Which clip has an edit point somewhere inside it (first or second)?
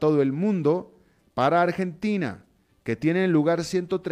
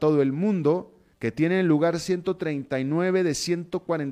second